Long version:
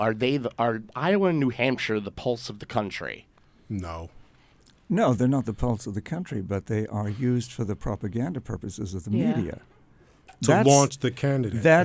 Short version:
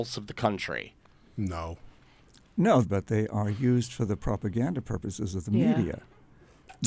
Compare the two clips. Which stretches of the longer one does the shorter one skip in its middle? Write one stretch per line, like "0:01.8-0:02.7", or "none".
0:05.2-0:06.4